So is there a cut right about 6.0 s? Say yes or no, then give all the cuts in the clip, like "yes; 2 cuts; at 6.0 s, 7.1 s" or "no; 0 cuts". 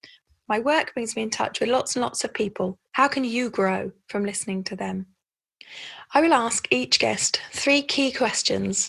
no; 1 cut; at 2.9 s